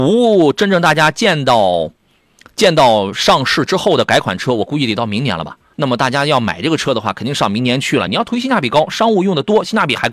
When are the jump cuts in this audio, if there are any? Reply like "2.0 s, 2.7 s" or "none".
5.7 s, 8.1 s